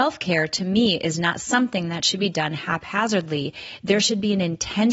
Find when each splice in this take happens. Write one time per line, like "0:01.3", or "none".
none